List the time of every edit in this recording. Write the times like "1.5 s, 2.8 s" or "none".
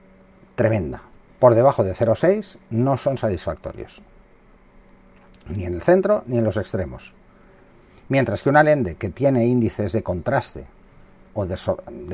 1.3 s

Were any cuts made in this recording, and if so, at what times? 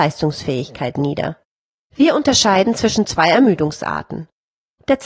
1.9 s

